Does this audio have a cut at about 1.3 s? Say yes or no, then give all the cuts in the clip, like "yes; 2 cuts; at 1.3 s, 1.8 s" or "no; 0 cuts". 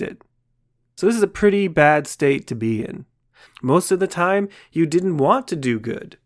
no; 1 cut; at 3.5 s